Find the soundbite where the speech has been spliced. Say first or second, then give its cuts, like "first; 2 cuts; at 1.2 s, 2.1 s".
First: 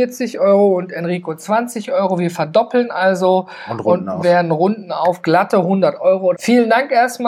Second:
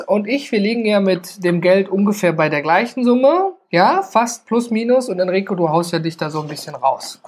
first; 1 cut; at 6.3 s